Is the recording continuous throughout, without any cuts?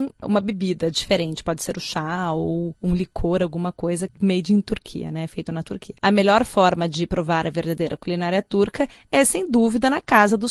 yes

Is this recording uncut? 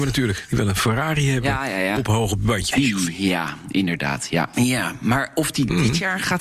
no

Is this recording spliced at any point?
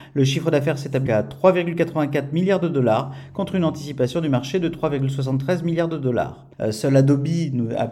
yes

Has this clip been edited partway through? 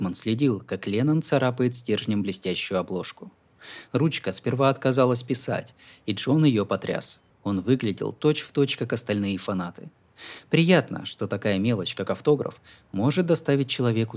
yes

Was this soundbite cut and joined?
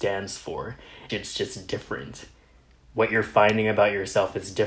yes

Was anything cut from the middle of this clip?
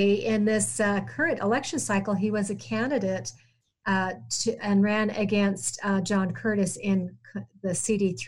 no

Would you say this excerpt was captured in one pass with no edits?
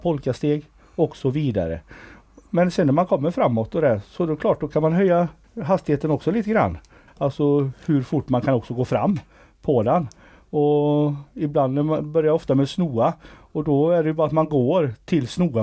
no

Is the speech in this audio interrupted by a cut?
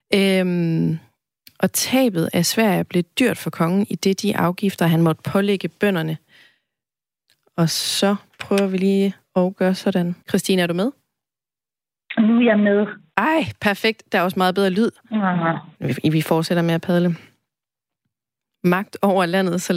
yes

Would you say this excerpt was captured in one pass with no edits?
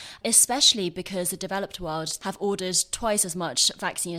no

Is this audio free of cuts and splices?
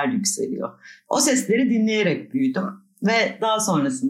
yes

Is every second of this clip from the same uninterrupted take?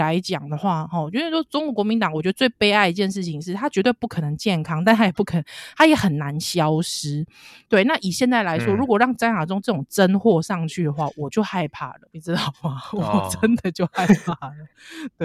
no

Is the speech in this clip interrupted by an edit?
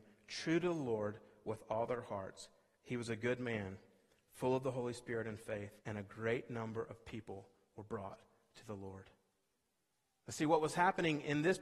yes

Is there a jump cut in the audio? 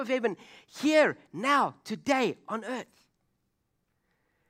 no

